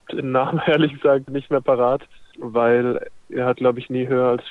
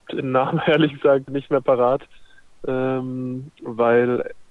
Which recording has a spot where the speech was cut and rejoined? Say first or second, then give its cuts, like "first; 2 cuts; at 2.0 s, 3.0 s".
first; 1 cut; at 2.3 s